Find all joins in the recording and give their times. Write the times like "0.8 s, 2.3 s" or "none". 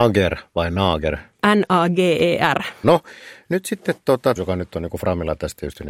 2.8 s, 4.4 s